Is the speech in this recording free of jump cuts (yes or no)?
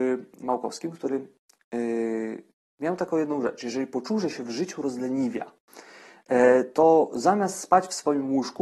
yes